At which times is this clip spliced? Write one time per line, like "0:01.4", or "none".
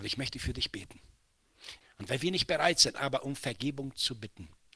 0:01.8
0:02.9